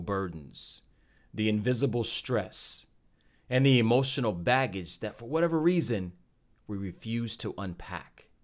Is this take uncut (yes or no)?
yes